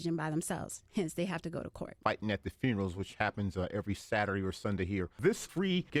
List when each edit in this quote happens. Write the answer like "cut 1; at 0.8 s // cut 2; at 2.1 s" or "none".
none

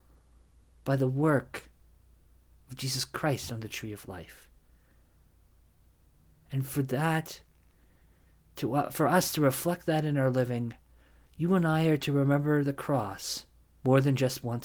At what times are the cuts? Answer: none

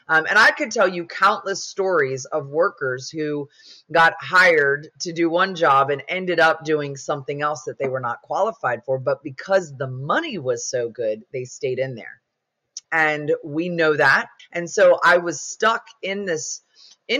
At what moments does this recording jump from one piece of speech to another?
cut 1; at 12.8 s // cut 2; at 14.4 s

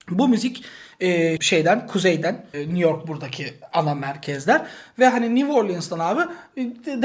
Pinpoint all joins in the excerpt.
cut 1; at 1.4 s // cut 2; at 2.5 s

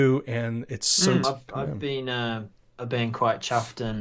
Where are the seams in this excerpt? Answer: cut 1; at 1.2 s

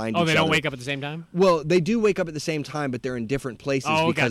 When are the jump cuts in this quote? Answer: none

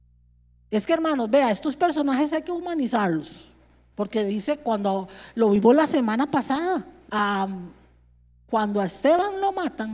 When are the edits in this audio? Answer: cut 1; at 3.9 s // cut 2; at 7.1 s

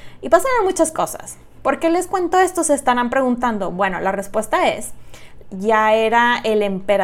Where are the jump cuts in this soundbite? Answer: cut 1; at 5.4 s

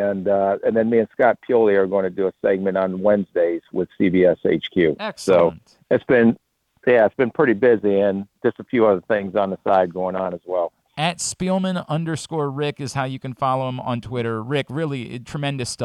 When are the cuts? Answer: none

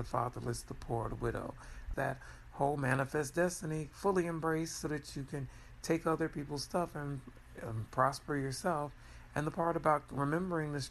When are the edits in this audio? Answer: cut 1; at 1.9 s

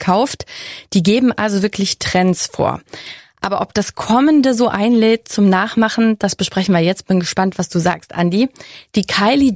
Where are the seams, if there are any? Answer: none

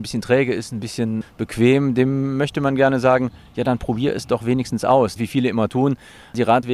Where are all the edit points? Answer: cut 1; at 5.2 s

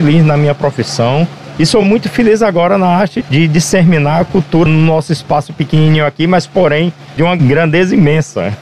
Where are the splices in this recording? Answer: none

